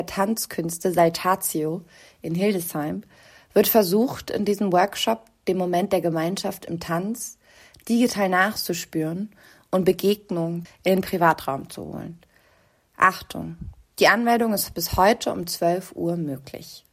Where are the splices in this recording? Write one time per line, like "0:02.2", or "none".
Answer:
0:10.7